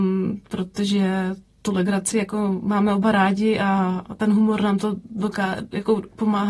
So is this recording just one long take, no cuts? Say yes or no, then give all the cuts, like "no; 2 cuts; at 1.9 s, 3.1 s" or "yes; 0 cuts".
yes; 0 cuts